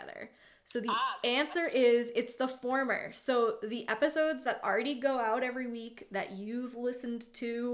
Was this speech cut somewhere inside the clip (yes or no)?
no